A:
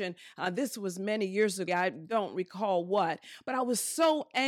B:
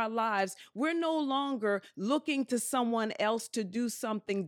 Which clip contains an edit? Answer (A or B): A